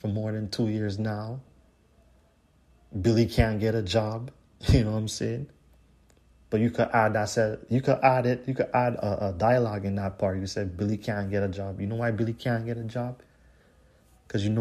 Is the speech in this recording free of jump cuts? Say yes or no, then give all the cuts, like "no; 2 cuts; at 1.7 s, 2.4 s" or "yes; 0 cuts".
yes; 0 cuts